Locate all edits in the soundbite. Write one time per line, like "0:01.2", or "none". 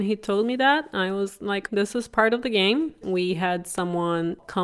0:01.7
0:03.0